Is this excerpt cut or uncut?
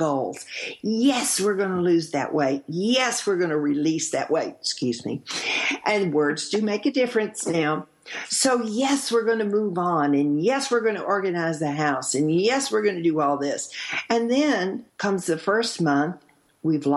cut